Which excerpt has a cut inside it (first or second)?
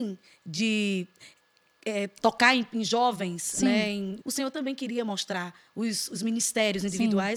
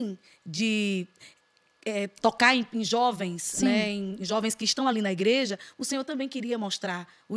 first